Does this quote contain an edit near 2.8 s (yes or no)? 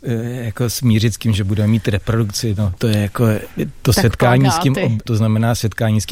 yes